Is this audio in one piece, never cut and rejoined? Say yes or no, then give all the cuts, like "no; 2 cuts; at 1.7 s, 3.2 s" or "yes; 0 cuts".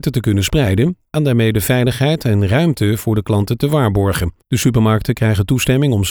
no; 1 cut; at 4.4 s